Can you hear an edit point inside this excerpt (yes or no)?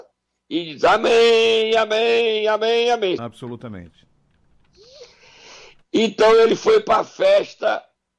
yes